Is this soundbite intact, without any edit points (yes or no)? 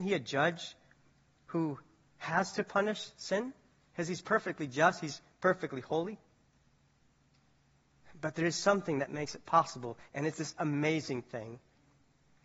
yes